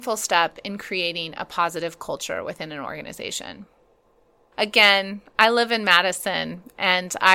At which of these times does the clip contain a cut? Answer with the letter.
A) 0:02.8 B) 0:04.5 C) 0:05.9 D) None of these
B